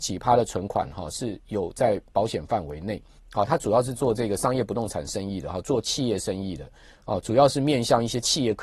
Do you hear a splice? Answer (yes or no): yes